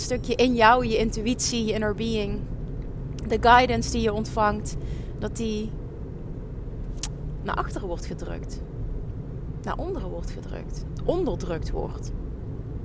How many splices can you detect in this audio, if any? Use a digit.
0